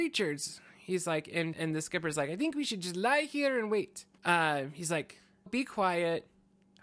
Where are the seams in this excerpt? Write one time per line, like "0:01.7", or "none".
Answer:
0:01.5
0:04.2
0:05.5